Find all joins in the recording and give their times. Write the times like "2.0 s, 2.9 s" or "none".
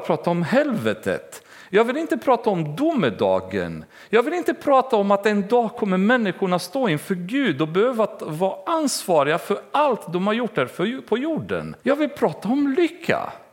11.8 s